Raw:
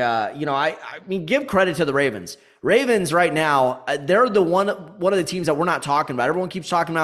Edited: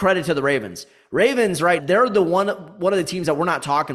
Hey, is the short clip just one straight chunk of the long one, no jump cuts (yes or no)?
no